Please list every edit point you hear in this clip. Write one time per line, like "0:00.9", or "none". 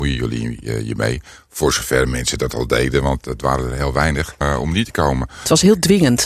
0:04.4